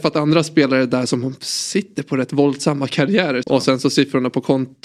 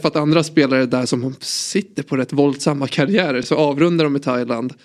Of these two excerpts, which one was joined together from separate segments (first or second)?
first